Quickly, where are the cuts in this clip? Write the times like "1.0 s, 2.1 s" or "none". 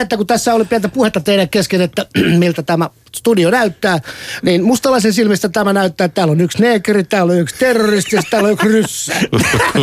none